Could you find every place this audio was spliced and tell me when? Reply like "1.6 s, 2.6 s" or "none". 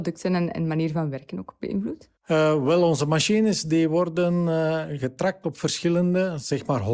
2.2 s